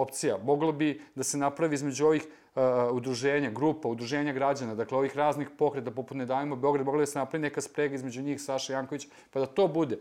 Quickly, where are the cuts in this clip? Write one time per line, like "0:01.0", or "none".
none

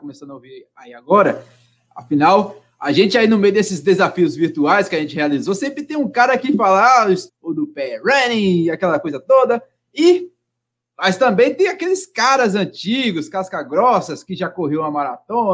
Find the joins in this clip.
0:07.3

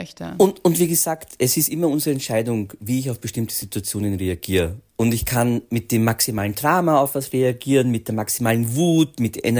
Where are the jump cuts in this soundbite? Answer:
none

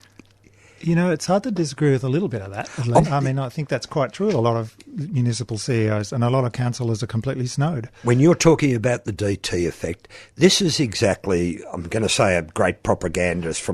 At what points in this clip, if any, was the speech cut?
0:03.0

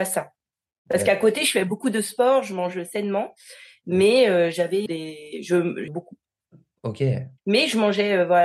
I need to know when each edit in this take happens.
0:04.9
0:05.9
0:07.4

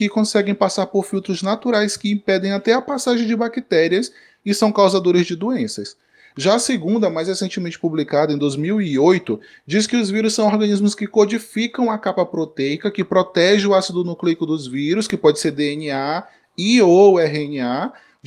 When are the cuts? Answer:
none

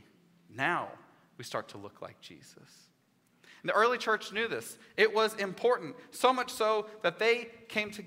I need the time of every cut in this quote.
none

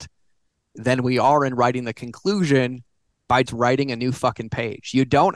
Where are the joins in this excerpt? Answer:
0:03.5

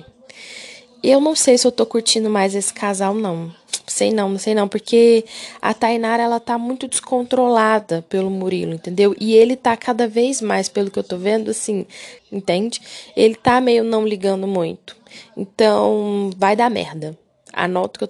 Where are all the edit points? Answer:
0:12.2

